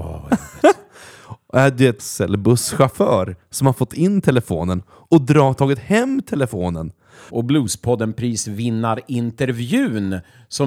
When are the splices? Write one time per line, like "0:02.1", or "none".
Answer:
0:02.0
0:07.3